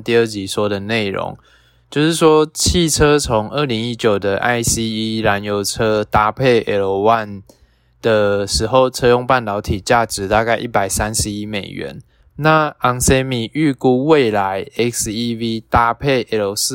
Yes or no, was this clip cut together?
yes